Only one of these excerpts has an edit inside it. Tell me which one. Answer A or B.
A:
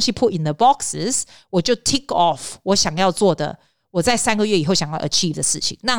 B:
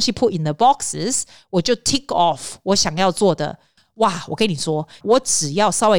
B